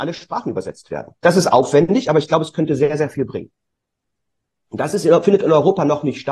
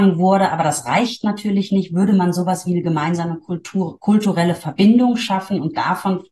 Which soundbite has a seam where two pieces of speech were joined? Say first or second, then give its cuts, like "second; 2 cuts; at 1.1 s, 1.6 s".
first; 1 cut; at 4.5 s